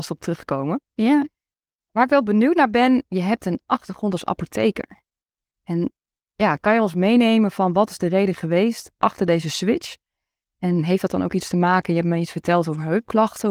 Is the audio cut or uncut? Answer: cut